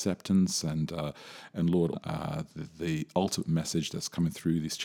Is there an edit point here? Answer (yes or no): yes